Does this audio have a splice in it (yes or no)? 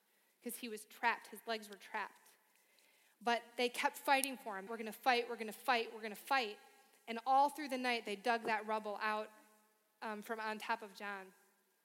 yes